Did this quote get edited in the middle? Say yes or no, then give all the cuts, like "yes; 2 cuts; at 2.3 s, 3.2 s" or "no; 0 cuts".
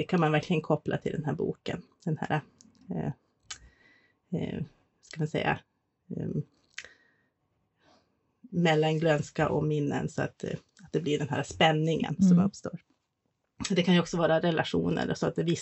no; 0 cuts